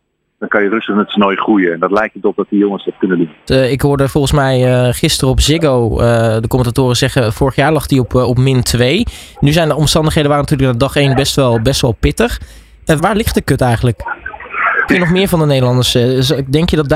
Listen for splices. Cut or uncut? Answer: cut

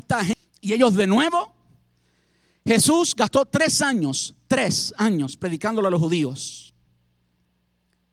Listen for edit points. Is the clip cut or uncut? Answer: uncut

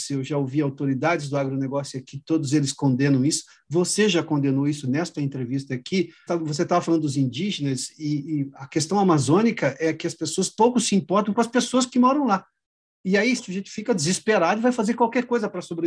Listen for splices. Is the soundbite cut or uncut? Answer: cut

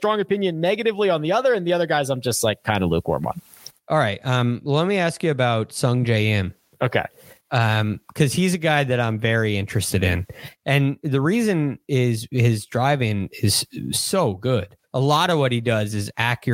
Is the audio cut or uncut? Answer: cut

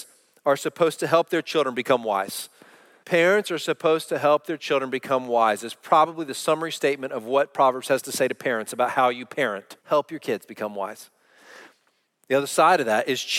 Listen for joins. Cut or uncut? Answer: cut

